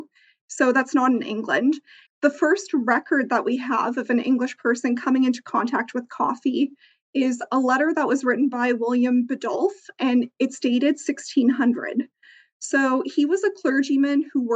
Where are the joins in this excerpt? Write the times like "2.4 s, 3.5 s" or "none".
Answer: 2.1 s